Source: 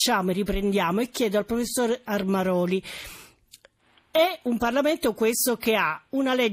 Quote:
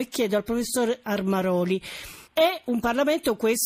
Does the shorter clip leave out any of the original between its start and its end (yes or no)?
yes